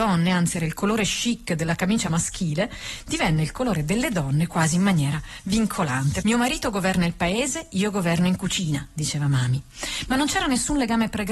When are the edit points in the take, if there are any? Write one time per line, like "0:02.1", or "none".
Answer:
0:06.2